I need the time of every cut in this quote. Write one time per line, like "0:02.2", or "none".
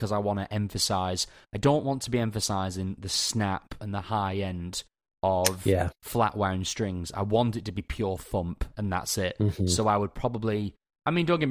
none